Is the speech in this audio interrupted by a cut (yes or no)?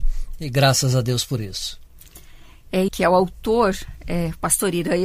yes